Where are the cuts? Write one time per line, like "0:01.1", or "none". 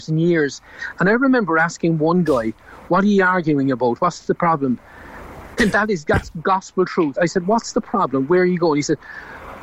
0:05.6
0:07.2

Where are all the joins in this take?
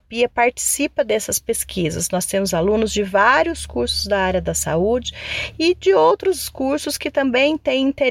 none

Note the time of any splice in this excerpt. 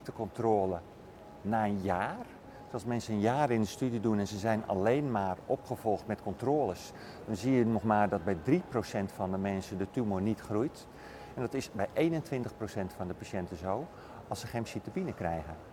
none

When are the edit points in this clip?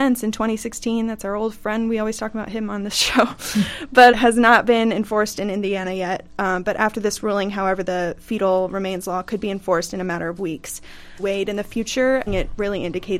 0:04.1
0:11.2
0:12.3

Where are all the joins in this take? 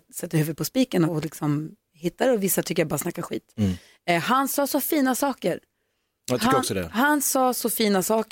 0:01.1

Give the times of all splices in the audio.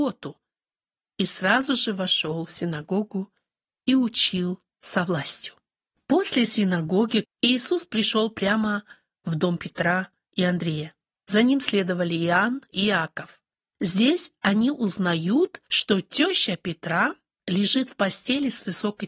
0:07.2

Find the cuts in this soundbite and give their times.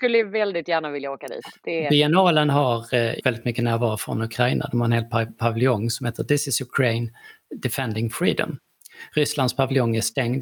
0:03.2

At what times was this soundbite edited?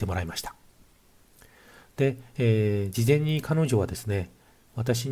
none

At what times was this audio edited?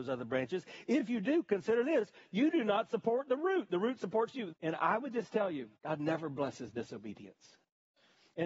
0:04.5
0:05.8

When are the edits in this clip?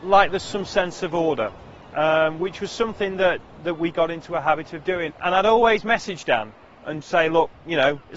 0:05.1
0:07.0

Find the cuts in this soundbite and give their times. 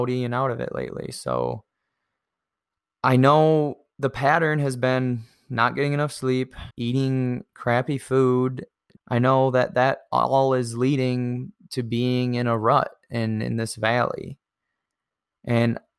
0:06.7
0:09.0

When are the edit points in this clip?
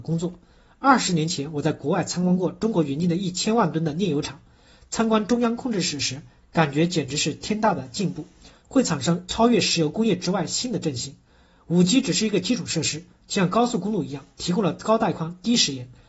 0:08.6

